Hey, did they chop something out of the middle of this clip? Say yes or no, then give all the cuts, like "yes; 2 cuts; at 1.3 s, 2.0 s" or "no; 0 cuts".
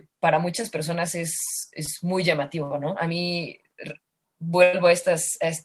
no; 0 cuts